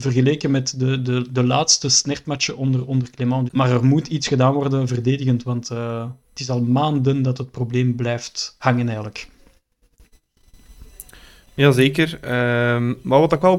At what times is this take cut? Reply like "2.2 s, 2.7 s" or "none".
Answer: 3.5 s